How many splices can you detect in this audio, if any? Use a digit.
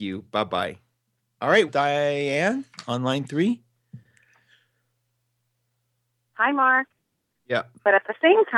2